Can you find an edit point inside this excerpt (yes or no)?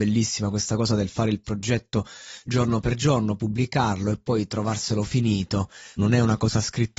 yes